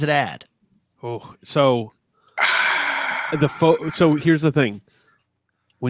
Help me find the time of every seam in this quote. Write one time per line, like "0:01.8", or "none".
0:03.3